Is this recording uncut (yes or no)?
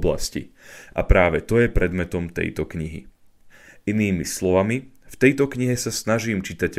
yes